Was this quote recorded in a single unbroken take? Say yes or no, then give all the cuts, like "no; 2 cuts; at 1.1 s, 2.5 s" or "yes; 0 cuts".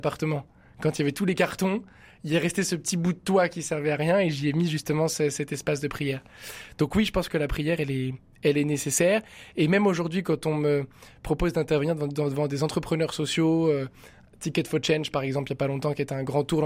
yes; 0 cuts